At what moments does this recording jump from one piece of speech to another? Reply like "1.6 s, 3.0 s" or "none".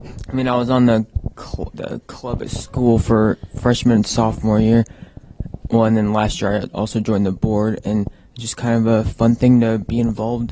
1.7 s